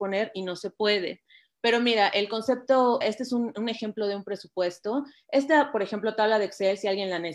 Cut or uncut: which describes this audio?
cut